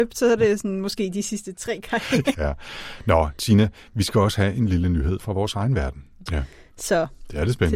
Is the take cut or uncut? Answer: cut